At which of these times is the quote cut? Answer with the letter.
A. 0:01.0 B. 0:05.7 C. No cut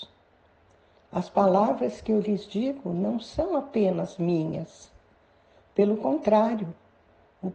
A